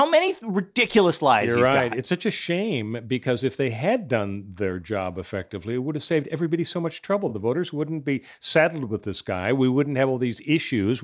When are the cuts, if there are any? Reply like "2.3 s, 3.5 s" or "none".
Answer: none